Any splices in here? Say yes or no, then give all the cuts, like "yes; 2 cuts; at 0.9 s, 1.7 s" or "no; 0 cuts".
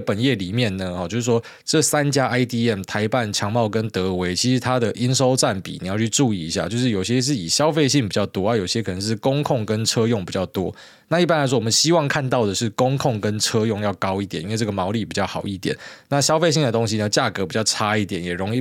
no; 0 cuts